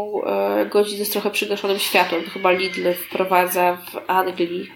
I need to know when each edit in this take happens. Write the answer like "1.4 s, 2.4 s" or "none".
none

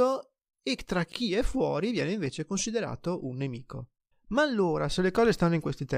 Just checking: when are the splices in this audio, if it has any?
4.1 s

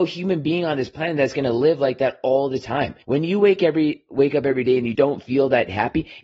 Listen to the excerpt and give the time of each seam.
3.0 s, 4.9 s

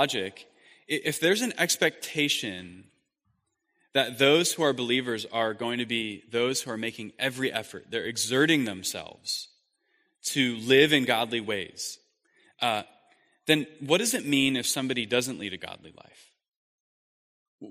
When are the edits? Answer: none

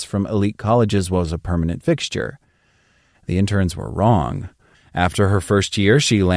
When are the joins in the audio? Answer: 4.7 s

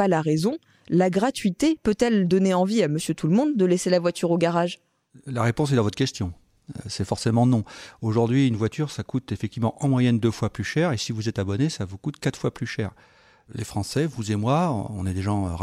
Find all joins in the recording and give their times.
none

